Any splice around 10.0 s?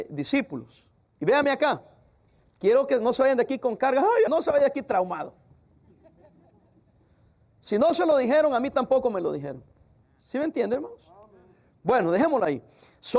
yes; 2 cuts; at 4.3 s, 10.0 s

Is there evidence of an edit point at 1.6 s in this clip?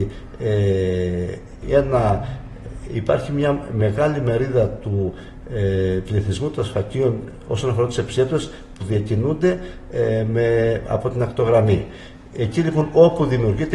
yes; 1 cut; at 1.6 s

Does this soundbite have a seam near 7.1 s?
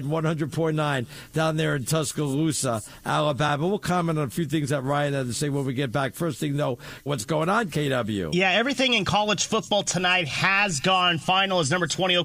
yes; 1 cut; at 7.1 s

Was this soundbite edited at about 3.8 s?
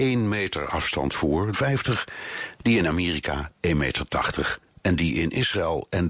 no; 1 cut; at 1.5 s

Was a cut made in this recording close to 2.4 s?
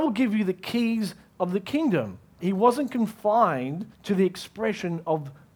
yes; 2 cuts; at 2.4 s, 3.9 s

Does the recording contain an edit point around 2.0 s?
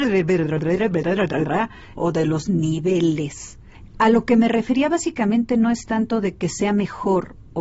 yes; 1 cut; at 2.0 s

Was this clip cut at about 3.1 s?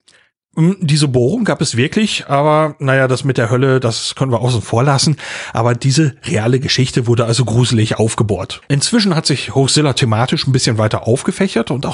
no; 1 cut; at 8.6 s

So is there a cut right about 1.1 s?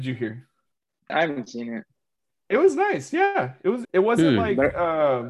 yes; 2 cuts; at 1.1 s, 3.8 s

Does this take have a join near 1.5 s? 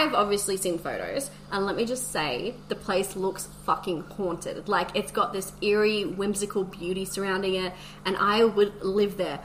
yes; 1 cut; at 1.5 s

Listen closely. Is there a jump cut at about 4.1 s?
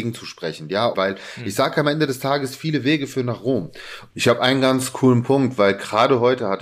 yes; 2 cuts; at 0.9 s, 4.1 s

